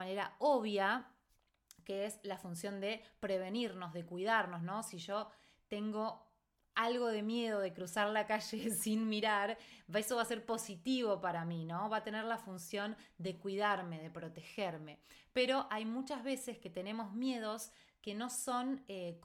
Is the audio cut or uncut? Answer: uncut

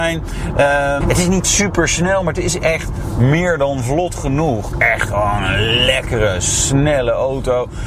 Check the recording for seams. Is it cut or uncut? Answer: cut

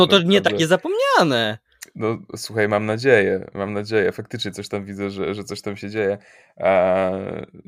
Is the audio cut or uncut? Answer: uncut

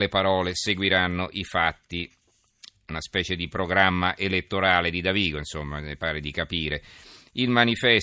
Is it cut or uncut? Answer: uncut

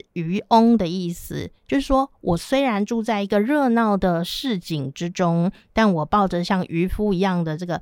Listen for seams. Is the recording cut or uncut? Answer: uncut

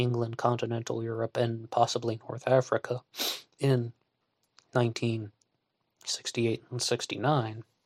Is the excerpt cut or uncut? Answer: uncut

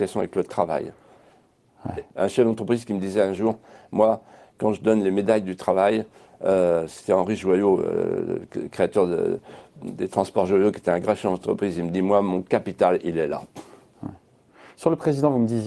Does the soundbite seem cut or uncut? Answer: cut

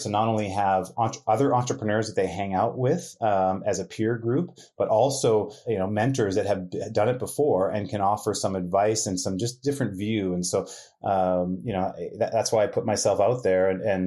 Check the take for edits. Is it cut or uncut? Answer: uncut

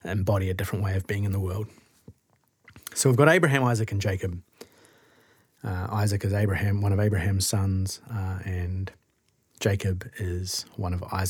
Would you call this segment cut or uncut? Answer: uncut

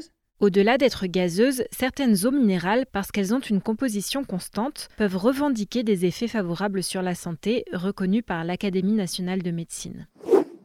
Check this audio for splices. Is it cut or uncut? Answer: uncut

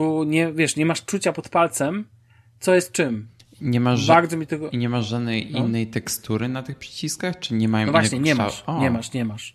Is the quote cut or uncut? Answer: uncut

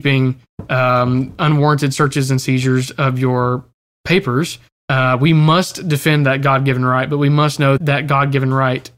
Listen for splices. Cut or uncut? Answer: cut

